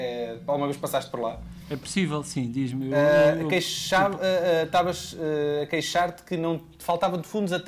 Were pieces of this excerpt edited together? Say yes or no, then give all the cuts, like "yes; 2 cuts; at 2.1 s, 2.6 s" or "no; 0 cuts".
no; 0 cuts